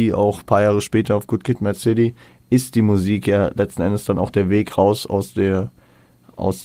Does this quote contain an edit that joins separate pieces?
no; 0 cuts

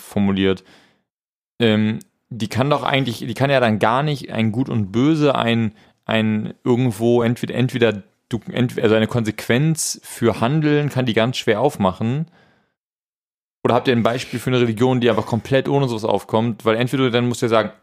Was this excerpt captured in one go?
yes; 0 cuts

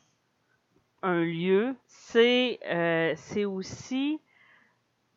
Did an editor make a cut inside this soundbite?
yes; 1 cut; at 1.8 s

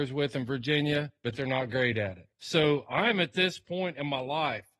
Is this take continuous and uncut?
no; 2 cuts; at 1.2 s, 2.3 s

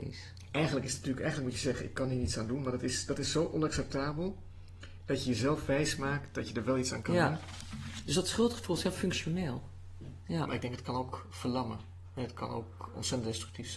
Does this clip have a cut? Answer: yes; 1 cut; at 10.2 s

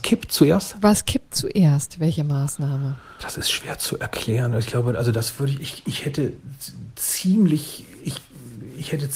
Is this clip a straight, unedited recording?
no; 1 cut; at 3.2 s

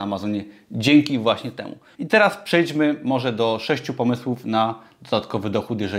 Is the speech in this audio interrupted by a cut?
yes; 1 cut; at 1.9 s

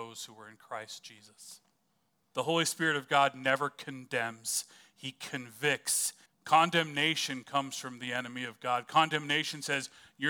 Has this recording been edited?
yes; 2 cuts; at 2.3 s, 6.3 s

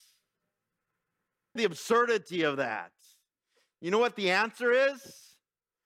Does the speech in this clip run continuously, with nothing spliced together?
no; 1 cut; at 1.6 s

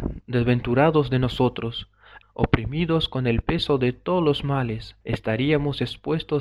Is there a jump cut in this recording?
yes; 2 cuts; at 2.2 s, 5.0 s

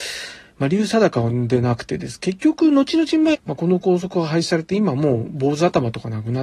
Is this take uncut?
no; 1 cut; at 3.3 s

